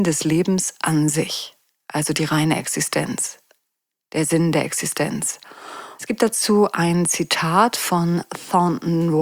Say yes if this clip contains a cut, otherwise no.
yes